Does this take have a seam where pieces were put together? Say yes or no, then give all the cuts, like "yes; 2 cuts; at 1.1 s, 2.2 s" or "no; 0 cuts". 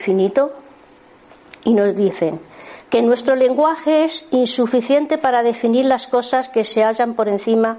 yes; 1 cut; at 2.8 s